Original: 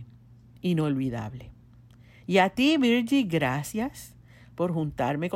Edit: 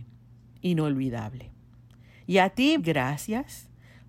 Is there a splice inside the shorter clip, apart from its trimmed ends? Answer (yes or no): yes